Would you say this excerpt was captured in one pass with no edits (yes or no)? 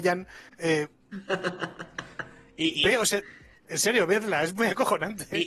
yes